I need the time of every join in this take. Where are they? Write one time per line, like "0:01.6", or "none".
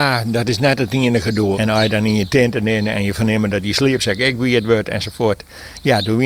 0:01.5

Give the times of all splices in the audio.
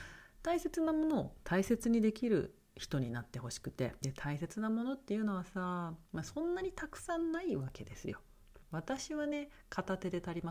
0:04.0
0:06.1
0:08.6

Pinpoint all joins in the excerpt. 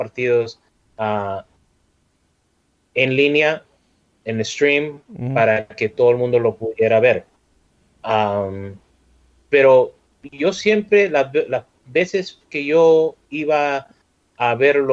none

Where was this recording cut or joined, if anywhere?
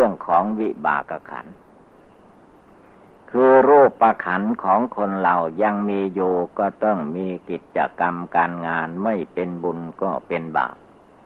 0:01.0

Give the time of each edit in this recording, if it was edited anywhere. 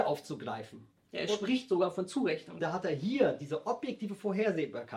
0:02.6

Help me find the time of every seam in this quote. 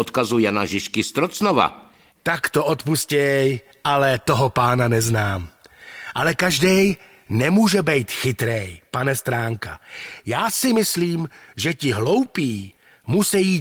0:02.1

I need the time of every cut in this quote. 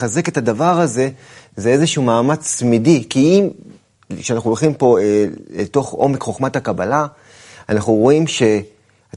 none

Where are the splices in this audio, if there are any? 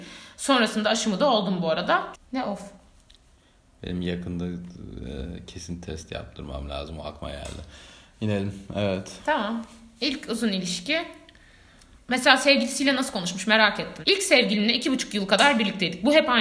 0:02.1
0:14.0

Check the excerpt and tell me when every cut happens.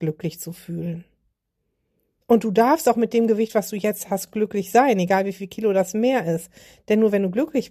none

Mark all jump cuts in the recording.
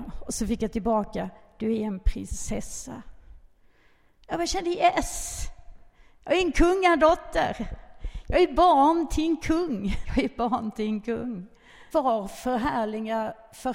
0:10.0
0:11.9

